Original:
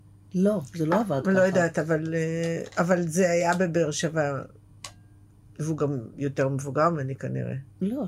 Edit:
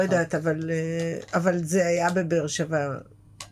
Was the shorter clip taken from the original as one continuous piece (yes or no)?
yes